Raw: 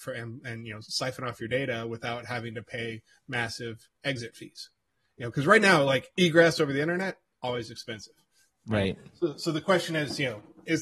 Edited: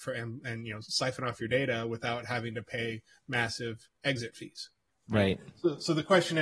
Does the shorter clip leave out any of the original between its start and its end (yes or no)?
yes